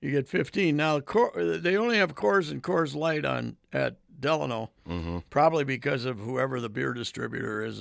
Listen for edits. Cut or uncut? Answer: uncut